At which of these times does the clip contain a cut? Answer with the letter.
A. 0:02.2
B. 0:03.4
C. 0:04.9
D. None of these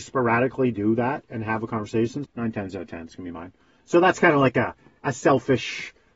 A